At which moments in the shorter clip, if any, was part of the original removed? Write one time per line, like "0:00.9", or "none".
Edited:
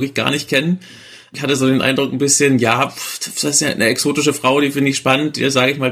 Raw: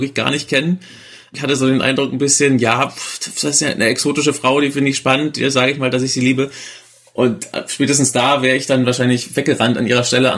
none